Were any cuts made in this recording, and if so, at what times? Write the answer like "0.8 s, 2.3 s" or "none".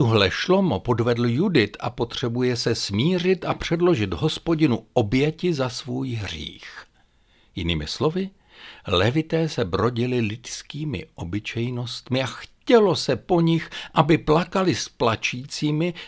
none